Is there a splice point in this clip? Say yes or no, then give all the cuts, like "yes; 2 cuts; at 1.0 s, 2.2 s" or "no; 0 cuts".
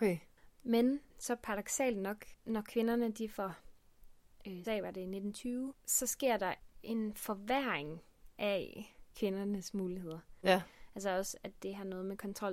yes; 2 cuts; at 4.6 s, 10.4 s